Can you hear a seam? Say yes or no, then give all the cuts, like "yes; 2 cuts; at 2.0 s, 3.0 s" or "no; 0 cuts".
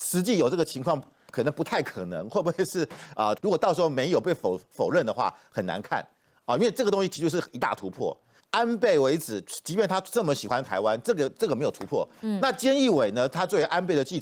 yes; 2 cuts; at 3.4 s, 8.4 s